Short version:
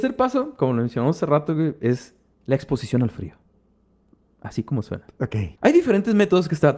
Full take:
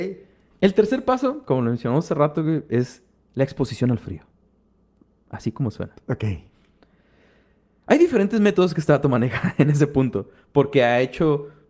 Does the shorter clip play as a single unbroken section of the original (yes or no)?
no